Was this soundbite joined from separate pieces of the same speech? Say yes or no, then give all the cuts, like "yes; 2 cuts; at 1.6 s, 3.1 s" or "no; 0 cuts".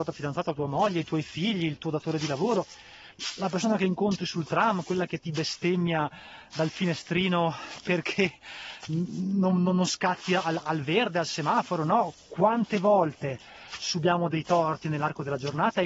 no; 0 cuts